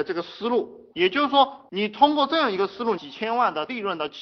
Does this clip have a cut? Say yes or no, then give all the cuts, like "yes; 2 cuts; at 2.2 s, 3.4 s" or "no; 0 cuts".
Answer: yes; 2 cuts; at 0.9 s, 3.0 s